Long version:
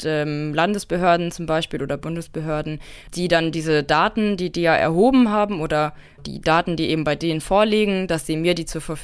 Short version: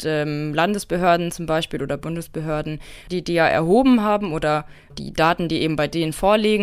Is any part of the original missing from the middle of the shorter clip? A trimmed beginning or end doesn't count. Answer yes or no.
yes